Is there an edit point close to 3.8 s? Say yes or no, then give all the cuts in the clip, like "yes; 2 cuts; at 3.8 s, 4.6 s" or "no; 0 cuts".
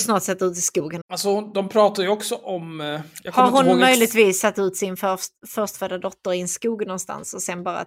no; 1 cut; at 1.0 s